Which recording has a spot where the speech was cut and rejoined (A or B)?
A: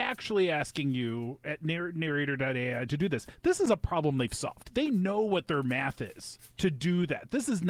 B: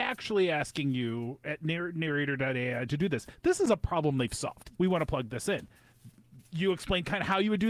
B